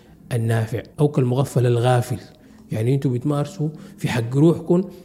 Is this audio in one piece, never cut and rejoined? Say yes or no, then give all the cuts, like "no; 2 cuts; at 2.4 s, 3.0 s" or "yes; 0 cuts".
no; 1 cut; at 0.9 s